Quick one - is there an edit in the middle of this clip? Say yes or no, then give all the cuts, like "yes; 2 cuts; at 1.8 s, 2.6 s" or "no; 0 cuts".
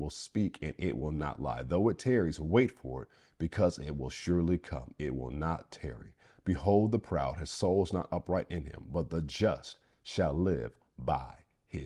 no; 0 cuts